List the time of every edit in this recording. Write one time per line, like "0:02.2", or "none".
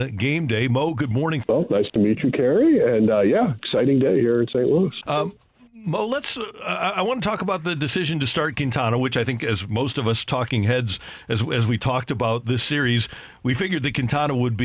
0:01.4
0:05.0